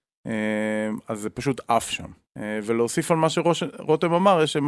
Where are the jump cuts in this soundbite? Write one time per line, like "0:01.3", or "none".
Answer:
0:02.3